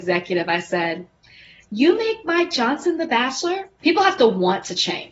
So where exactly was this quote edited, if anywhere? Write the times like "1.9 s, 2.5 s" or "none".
3.8 s